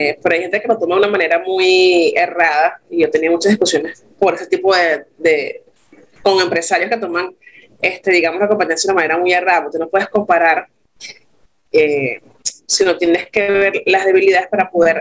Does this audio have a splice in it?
yes; 1 cut; at 12.7 s

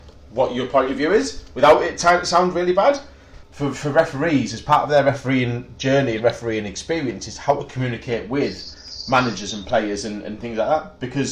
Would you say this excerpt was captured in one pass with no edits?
no; 1 cut; at 3.4 s

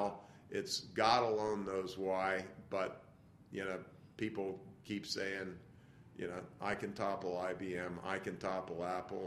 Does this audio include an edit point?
no; 0 cuts

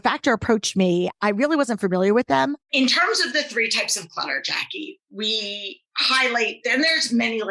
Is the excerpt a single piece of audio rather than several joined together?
no; 1 cut; at 2.7 s

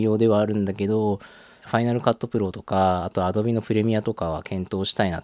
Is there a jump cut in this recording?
yes; 1 cut; at 1.6 s

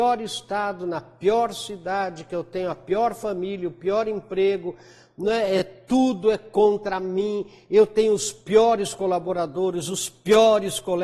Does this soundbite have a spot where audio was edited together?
no; 0 cuts

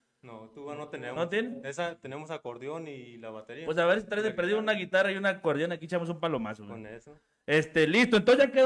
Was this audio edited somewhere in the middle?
no; 0 cuts

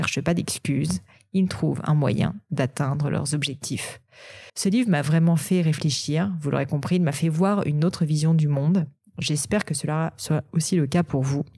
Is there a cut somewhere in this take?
yes; 1 cut; at 4.5 s

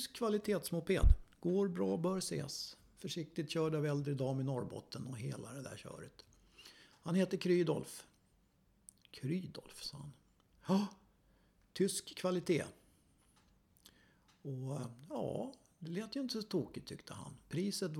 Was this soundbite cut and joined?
no; 0 cuts

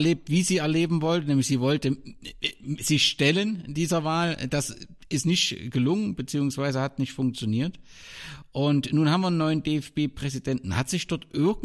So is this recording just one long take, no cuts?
yes; 0 cuts

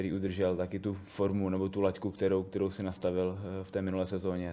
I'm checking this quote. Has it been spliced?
no; 0 cuts

